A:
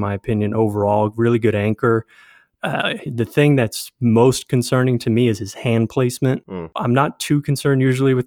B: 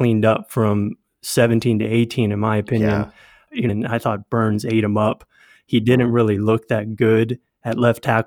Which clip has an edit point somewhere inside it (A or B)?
B